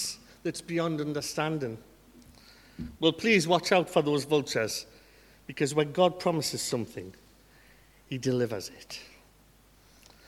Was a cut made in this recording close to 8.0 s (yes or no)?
no